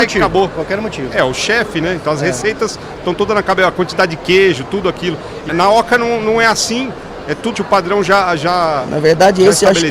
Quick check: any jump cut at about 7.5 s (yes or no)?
yes